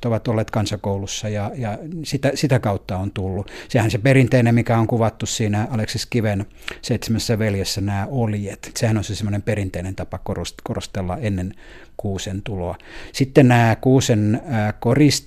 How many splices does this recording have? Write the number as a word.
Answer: one